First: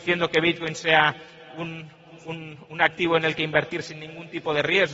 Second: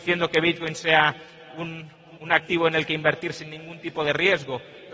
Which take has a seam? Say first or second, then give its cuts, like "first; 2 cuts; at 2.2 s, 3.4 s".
second; 1 cut; at 2.2 s